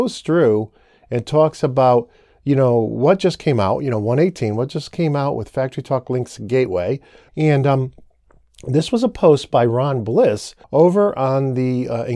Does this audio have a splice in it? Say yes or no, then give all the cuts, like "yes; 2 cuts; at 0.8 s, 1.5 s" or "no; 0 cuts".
yes; 2 cuts; at 7.3 s, 10.6 s